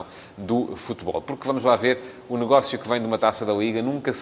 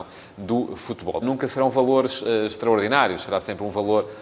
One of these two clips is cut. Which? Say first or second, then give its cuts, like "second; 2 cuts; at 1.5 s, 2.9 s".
second; 1 cut; at 1.2 s